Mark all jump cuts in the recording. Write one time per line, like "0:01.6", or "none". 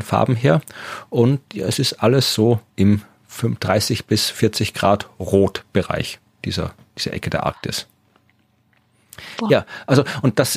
0:02.7